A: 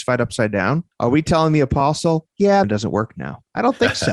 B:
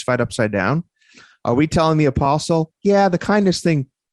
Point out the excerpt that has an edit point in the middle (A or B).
A